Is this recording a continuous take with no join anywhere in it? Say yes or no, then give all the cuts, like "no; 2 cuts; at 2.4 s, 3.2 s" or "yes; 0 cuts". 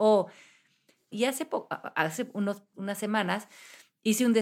no; 2 cuts; at 1.1 s, 2.7 s